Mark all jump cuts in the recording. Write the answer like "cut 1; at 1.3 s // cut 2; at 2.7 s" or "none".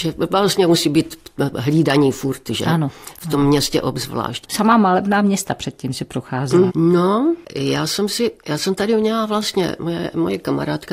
cut 1; at 4.4 s // cut 2; at 6.7 s // cut 3; at 8.4 s